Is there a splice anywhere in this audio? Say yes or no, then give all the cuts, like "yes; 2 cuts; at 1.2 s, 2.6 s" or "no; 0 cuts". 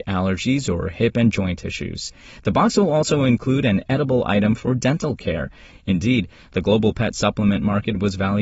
yes; 1 cut; at 5.7 s